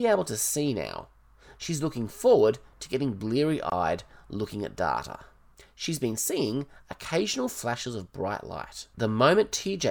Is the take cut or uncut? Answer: cut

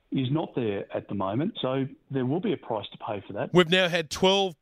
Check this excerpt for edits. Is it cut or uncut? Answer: cut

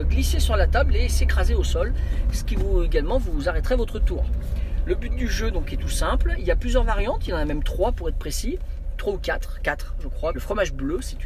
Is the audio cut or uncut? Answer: cut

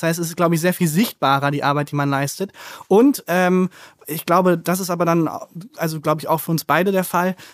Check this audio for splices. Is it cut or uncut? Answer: uncut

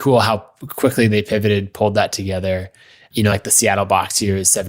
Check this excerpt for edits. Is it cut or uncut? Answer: uncut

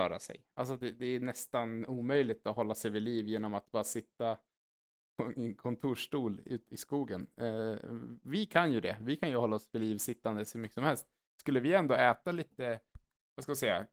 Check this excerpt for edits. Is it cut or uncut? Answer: cut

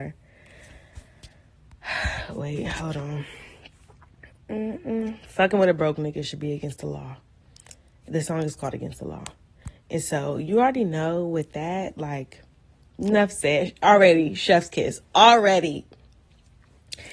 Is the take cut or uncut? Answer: uncut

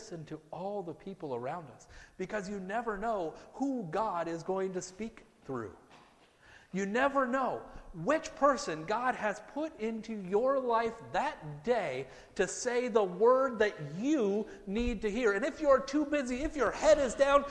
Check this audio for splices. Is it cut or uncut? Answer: uncut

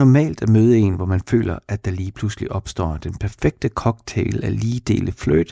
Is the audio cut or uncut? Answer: uncut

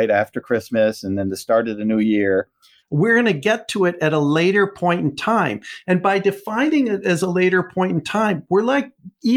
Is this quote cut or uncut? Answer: cut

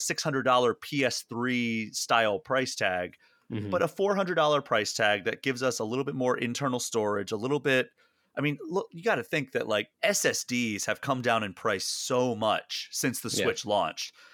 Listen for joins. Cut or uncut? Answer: cut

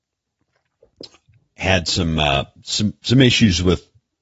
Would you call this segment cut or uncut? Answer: uncut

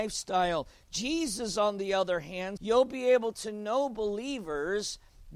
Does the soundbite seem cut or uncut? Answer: cut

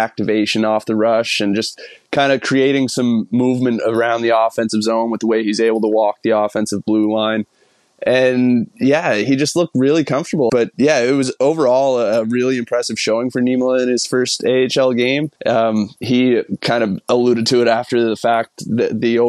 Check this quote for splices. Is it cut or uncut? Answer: cut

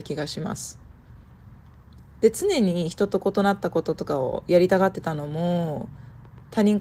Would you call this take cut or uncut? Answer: uncut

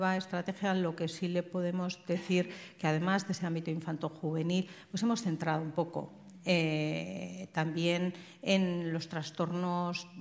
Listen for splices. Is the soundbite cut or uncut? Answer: uncut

